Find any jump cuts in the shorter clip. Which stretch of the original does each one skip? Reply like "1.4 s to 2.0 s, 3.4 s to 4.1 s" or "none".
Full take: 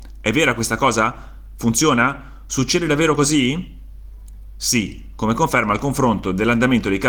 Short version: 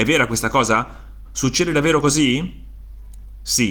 1.5 s to 2.4 s